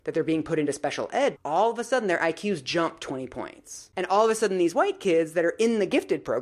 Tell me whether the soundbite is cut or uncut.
cut